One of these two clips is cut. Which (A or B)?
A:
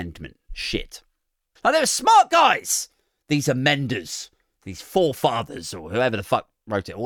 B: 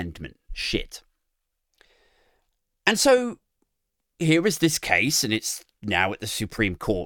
A